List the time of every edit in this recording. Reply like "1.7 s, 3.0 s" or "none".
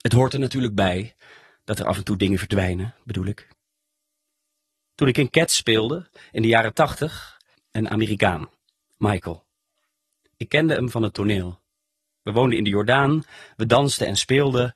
7.6 s